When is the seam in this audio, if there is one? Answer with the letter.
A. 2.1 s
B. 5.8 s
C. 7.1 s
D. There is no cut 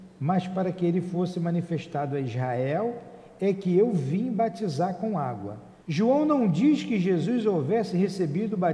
B